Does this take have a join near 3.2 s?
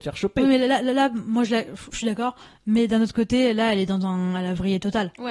no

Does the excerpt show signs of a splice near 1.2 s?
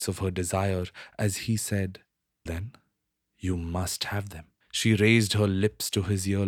no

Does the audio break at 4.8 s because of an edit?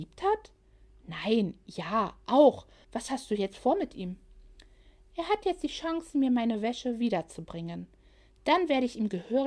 no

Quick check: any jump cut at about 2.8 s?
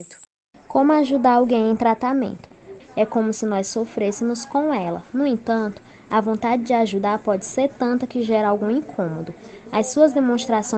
yes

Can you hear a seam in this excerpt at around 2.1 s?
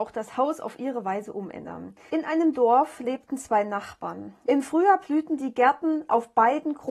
yes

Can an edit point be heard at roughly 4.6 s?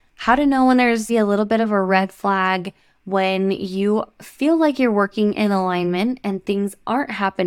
no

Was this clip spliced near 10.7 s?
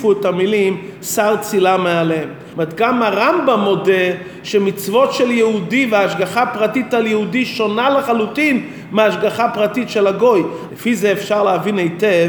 yes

